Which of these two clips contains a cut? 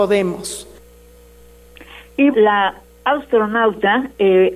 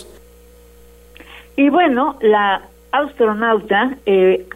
first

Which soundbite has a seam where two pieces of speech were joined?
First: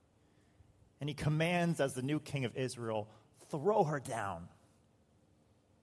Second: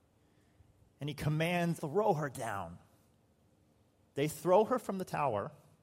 second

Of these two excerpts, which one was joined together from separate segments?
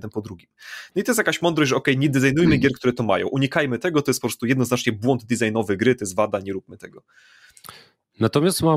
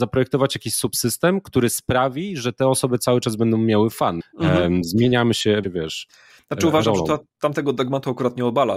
second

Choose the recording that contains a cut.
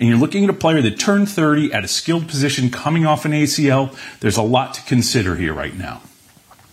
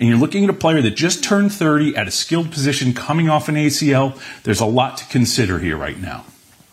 first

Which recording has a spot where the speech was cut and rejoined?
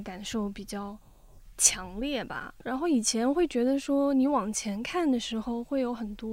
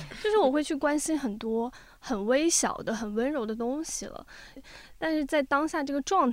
second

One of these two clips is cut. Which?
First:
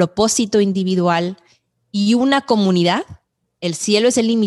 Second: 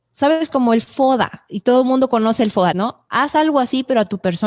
second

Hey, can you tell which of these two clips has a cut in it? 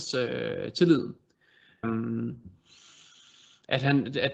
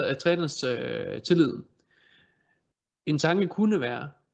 first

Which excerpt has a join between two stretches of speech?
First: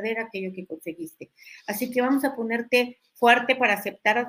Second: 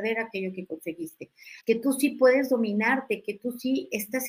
second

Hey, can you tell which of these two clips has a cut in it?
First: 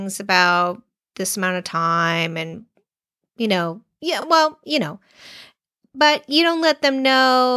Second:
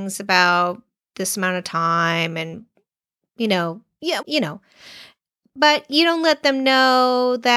second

